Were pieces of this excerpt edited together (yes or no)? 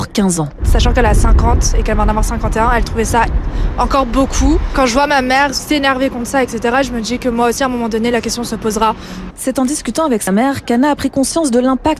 yes